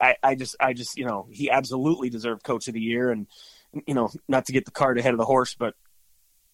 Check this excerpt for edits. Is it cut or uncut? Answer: uncut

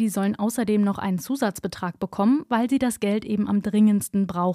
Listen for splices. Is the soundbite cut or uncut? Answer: uncut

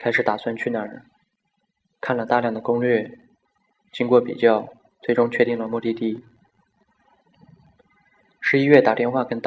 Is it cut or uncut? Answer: uncut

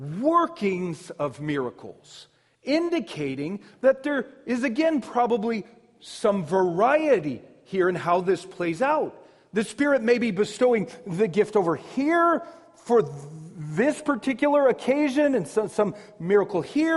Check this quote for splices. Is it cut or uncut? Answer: uncut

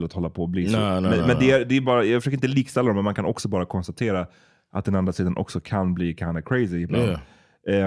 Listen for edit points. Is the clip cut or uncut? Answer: uncut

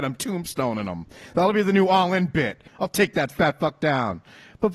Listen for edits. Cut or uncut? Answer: cut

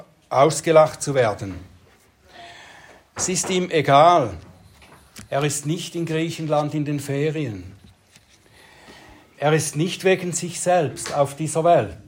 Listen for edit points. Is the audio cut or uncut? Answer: uncut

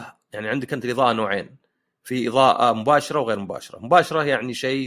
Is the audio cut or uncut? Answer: uncut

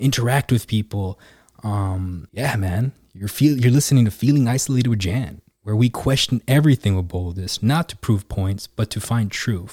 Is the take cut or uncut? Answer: uncut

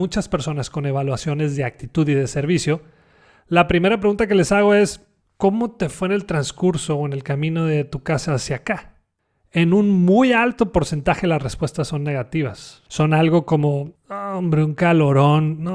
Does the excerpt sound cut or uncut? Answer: uncut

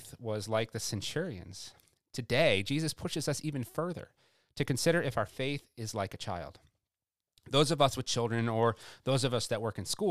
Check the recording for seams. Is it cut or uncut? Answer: uncut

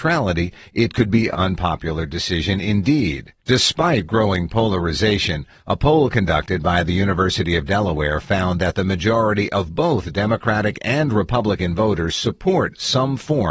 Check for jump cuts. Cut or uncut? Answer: cut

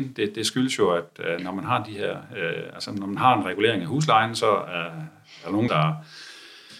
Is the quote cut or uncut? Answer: cut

